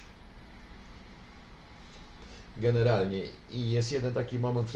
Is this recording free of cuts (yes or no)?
yes